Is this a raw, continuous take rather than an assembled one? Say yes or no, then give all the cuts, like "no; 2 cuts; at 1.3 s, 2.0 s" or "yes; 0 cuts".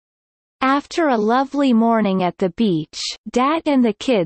no; 1 cut; at 3.2 s